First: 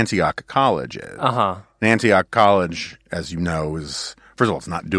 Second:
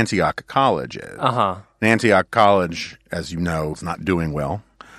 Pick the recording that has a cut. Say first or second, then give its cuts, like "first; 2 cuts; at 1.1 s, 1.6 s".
second; 1 cut; at 3.7 s